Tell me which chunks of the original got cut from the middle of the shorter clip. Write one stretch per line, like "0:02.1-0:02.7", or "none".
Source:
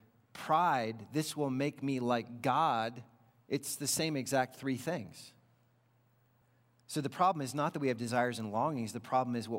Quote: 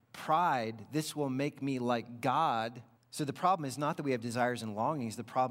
0:03.2-0:06.7